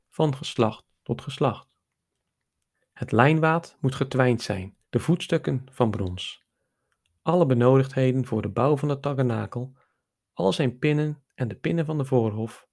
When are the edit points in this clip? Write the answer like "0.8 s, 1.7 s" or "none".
2.7 s, 4.8 s